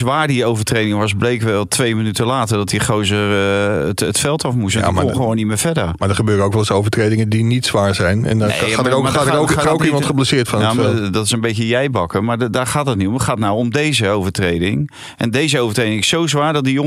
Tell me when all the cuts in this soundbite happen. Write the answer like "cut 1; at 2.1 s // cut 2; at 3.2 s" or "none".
cut 1; at 9.6 s